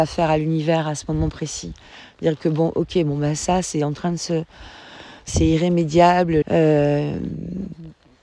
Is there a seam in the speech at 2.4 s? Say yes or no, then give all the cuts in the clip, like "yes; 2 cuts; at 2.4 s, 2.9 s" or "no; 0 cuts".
no; 2 cuts; at 5.3 s, 6.4 s